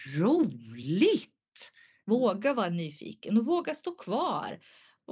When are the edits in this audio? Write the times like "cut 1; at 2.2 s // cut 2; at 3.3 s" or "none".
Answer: cut 1; at 2.0 s